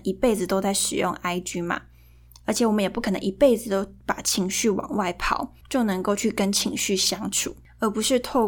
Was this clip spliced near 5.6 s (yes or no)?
yes